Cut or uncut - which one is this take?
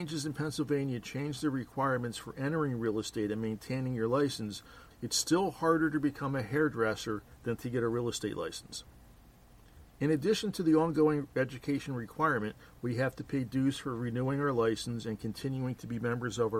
cut